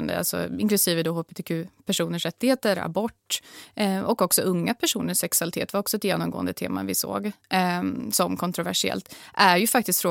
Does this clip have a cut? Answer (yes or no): no